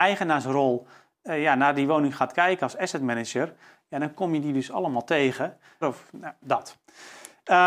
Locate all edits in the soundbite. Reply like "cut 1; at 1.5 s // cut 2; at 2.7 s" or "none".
cut 1; at 5.8 s